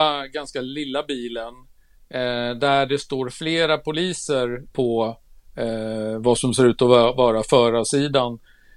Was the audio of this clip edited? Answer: yes; 1 cut; at 4.7 s

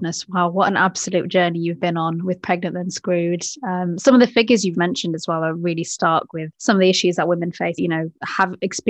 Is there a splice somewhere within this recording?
yes; 3 cuts; at 4.7 s, 6.5 s, 7.8 s

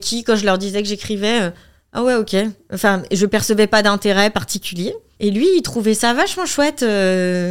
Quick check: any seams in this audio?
no; 0 cuts

